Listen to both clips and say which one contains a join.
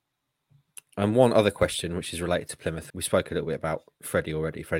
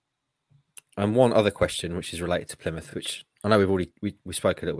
first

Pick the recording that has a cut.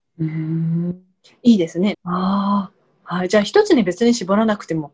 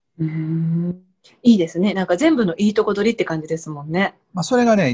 first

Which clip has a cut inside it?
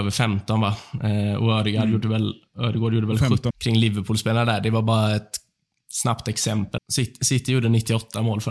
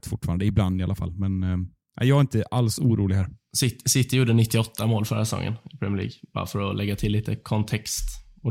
first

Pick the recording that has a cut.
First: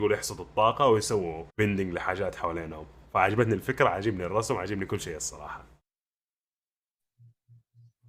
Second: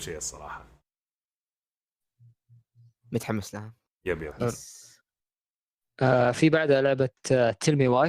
first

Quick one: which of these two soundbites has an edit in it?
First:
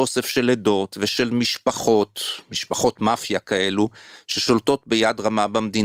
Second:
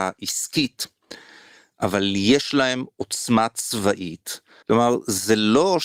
second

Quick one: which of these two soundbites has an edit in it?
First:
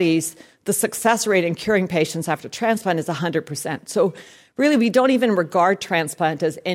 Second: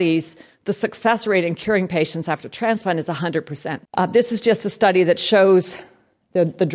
second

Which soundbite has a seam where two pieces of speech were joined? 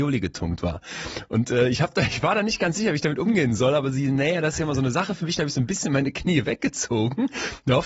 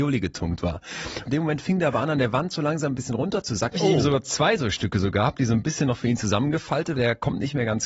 second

